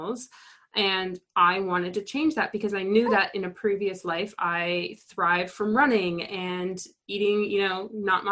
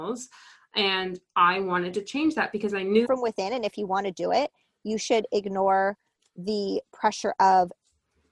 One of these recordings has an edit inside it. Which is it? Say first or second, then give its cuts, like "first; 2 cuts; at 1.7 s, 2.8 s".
second; 1 cut; at 3.0 s